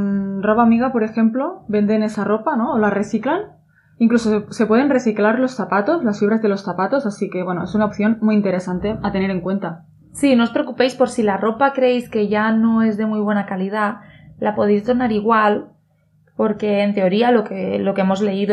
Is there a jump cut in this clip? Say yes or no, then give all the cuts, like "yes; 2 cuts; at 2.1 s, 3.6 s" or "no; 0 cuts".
no; 0 cuts